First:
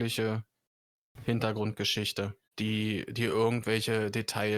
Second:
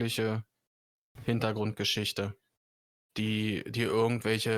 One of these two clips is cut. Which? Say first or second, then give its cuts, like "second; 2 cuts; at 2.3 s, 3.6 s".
first; 1 cut; at 2.5 s